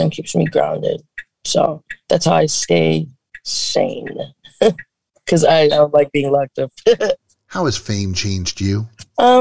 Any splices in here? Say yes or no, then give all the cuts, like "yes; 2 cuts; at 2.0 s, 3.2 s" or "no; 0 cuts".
no; 0 cuts